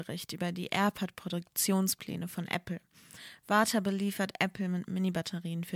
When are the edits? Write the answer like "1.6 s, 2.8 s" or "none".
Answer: none